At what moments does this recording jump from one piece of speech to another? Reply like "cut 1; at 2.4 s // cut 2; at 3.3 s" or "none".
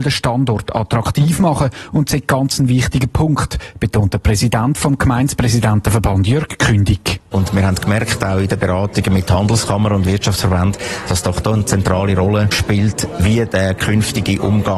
cut 1; at 7.3 s